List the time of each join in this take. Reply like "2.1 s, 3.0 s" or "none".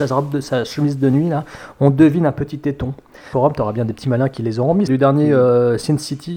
3.3 s, 4.9 s